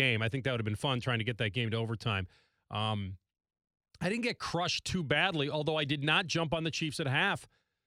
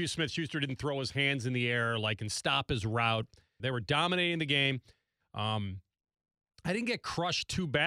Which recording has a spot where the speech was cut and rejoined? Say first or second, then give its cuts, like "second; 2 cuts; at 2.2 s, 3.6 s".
second; 2 cuts; at 3.6 s, 5.2 s